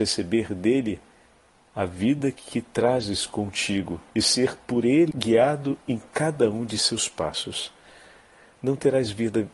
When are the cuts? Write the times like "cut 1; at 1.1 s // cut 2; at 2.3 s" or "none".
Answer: cut 1; at 4.1 s // cut 2; at 5.1 s